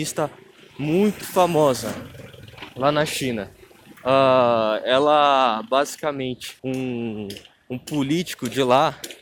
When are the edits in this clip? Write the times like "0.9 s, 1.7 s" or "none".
1.2 s, 4.0 s, 6.6 s